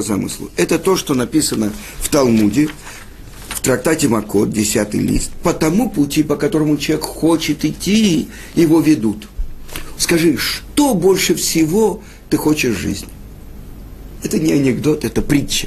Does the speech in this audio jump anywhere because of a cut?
yes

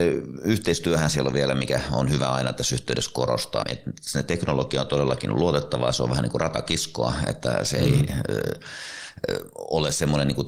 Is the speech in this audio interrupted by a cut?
yes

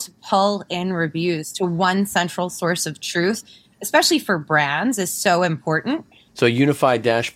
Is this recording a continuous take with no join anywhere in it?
no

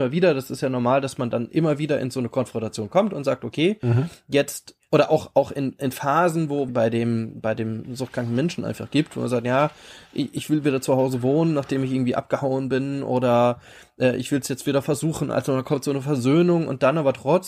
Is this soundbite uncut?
no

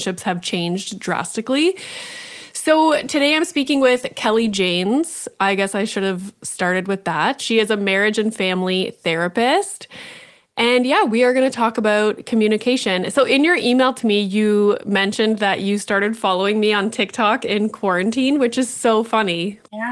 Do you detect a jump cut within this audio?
no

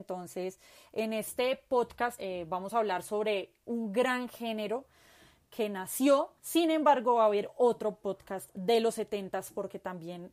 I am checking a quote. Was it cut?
yes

